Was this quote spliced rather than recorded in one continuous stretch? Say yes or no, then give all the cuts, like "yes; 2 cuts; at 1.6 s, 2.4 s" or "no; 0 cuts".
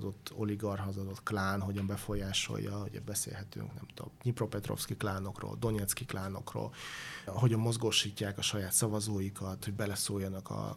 yes; 2 cuts; at 7.3 s, 9.6 s